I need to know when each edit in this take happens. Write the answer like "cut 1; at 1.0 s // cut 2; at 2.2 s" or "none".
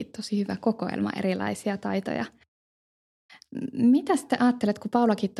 none